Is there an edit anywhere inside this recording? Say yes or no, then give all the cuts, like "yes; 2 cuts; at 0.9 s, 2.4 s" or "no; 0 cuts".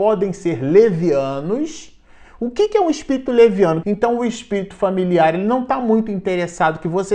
yes; 1 cut; at 3.8 s